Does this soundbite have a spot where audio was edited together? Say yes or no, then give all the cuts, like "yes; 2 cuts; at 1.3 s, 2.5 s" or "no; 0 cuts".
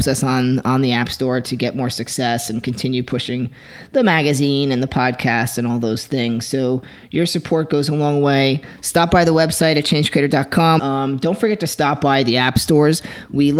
yes; 1 cut; at 10.8 s